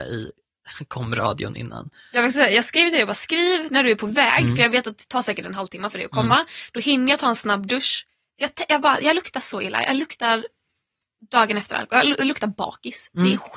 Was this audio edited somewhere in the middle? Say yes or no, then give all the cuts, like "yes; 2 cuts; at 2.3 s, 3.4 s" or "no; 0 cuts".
no; 0 cuts